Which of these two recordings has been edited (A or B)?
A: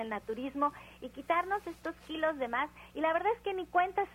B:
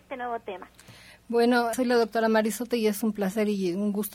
B